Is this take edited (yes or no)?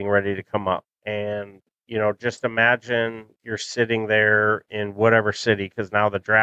yes